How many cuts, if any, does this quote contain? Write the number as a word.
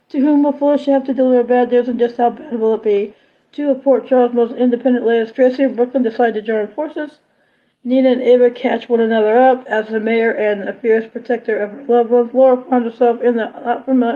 zero